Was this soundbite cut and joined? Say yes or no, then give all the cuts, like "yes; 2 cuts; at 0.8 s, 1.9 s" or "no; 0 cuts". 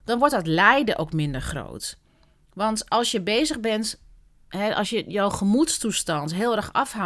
no; 0 cuts